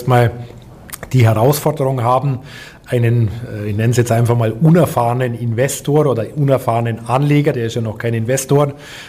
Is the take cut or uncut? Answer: uncut